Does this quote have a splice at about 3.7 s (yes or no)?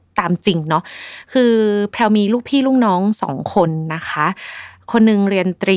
no